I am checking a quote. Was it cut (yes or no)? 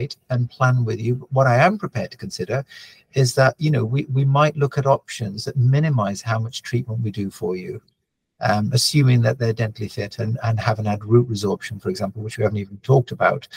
no